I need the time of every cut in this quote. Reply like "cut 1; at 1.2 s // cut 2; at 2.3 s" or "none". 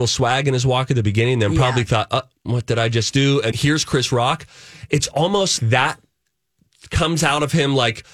cut 1; at 3.5 s // cut 2; at 5.6 s